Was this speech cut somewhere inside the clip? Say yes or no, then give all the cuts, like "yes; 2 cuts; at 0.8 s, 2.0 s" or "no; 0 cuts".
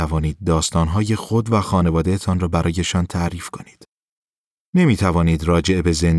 no; 0 cuts